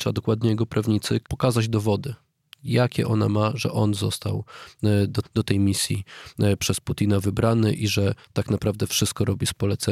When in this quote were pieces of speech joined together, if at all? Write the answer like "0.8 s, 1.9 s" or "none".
1.2 s, 5.2 s